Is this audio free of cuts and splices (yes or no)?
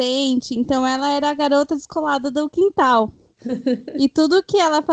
yes